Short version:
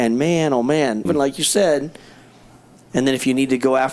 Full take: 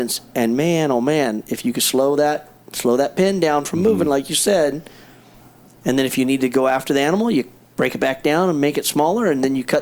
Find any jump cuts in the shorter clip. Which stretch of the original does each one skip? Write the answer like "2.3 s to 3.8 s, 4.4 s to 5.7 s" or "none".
1.4 s to 4.0 s